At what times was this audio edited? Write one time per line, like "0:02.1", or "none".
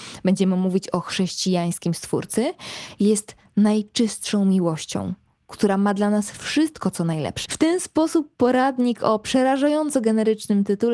0:07.4